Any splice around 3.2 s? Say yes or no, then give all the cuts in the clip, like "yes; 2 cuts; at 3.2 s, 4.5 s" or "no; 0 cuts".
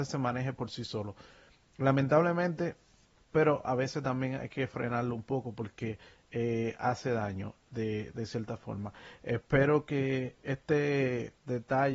yes; 1 cut; at 3.2 s